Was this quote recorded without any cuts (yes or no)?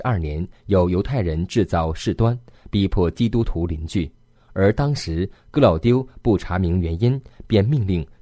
yes